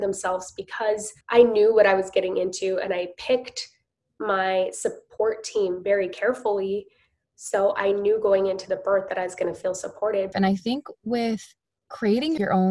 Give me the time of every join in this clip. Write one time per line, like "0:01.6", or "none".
0:01.2
0:10.3